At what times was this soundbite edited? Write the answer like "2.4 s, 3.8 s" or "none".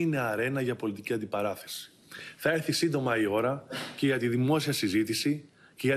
none